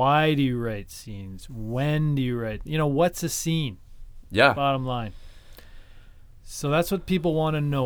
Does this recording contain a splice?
no; 0 cuts

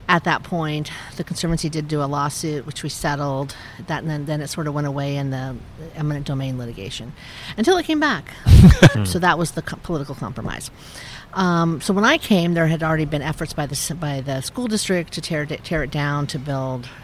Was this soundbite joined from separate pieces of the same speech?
yes; 1 cut; at 8.9 s

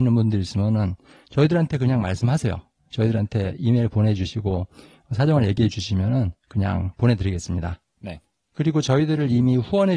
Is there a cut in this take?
no; 0 cuts

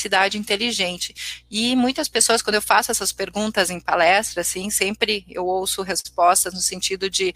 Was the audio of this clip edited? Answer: no; 0 cuts

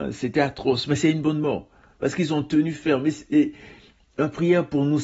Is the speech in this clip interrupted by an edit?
no; 0 cuts

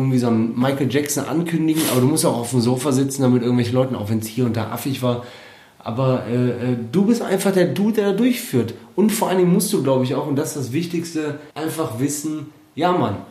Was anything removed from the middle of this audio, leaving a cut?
yes; 1 cut; at 11.5 s

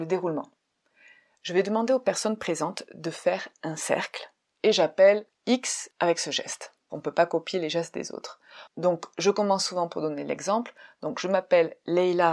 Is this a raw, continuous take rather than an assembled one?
no; 2 cuts; at 4.5 s, 6.9 s

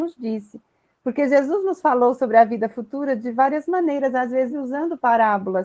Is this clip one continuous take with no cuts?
no; 1 cut; at 4.5 s

